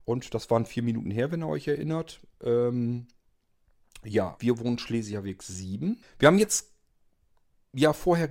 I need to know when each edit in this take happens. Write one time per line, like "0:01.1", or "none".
0:04.4
0:06.0